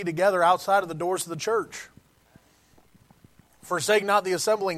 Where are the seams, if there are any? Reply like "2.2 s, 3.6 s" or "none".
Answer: none